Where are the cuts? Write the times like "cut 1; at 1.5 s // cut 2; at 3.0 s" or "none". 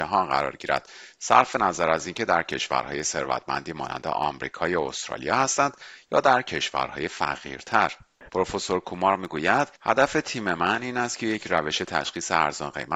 cut 1; at 8.3 s // cut 2; at 9.7 s